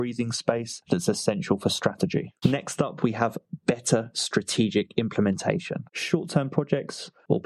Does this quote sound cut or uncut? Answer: cut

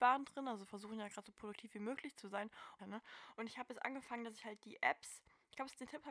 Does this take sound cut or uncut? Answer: cut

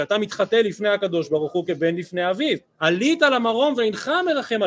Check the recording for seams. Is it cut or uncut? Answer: cut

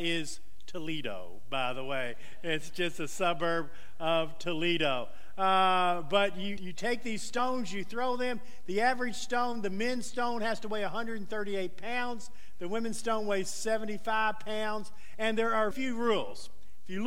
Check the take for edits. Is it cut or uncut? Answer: cut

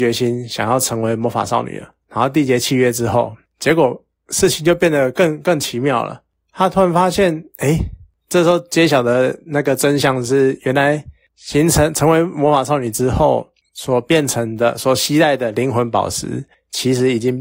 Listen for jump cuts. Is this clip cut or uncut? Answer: uncut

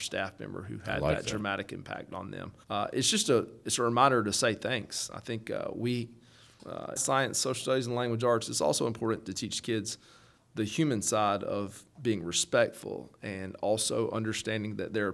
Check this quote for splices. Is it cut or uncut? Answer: cut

